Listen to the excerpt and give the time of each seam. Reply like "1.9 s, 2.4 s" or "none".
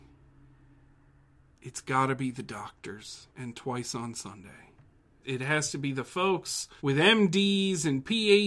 3.3 s, 5.2 s, 6.8 s